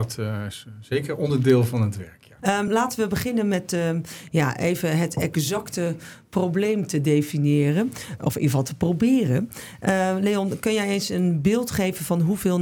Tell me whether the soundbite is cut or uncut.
uncut